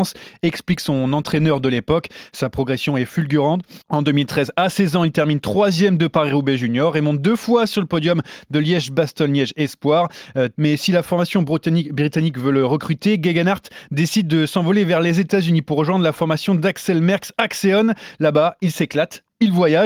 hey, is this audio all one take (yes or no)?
no